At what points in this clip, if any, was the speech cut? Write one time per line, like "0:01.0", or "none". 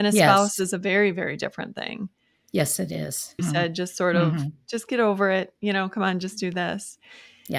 0:03.4